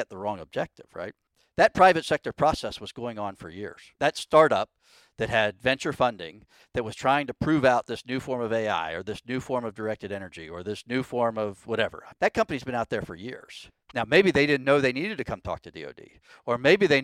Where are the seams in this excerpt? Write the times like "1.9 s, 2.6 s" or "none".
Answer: 12.2 s, 13.9 s